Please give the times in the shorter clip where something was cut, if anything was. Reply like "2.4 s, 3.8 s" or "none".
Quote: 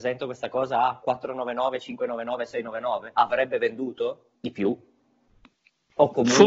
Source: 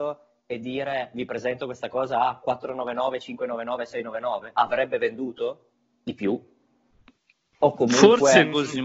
4.4 s